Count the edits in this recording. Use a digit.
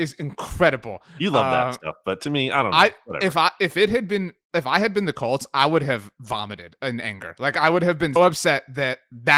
1